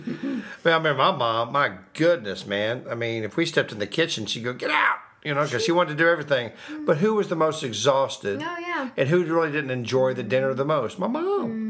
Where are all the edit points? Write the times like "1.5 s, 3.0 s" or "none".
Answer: none